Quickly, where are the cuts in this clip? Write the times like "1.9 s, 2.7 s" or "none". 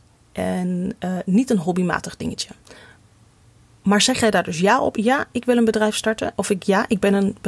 none